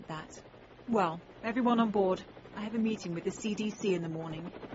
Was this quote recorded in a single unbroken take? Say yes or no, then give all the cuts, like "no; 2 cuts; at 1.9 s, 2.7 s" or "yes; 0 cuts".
no; 1 cut; at 1.3 s